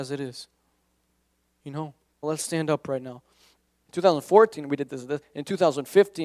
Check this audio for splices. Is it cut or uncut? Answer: cut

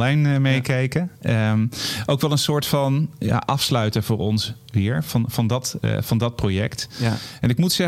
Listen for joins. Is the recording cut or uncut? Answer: uncut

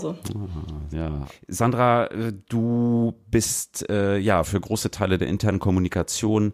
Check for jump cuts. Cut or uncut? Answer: cut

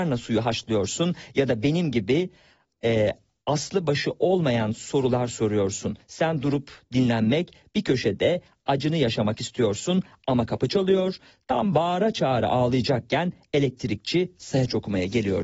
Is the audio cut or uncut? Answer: uncut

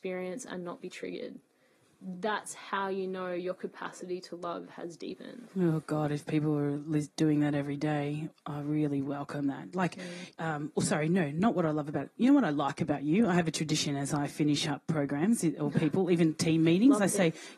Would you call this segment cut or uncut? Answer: cut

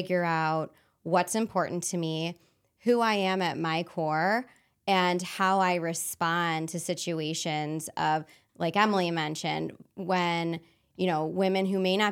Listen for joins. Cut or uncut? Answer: uncut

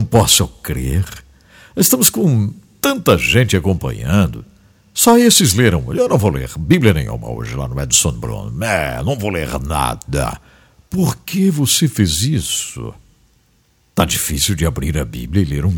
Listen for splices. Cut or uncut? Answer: uncut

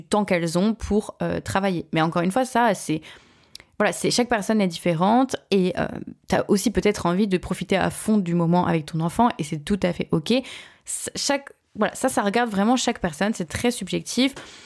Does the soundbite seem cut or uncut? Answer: uncut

